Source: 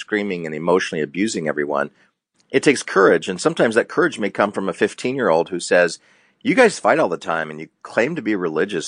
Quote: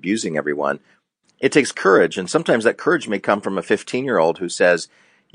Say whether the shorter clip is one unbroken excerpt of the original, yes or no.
yes